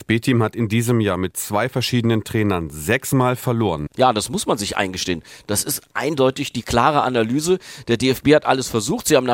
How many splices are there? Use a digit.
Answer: 1